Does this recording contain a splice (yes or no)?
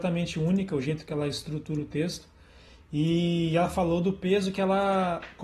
no